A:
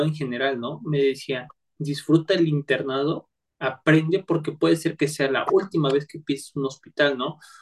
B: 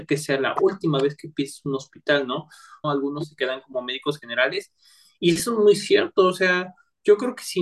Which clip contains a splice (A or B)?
B